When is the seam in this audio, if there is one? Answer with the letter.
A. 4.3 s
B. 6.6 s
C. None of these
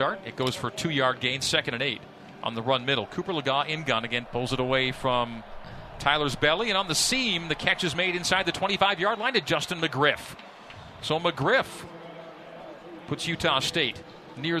A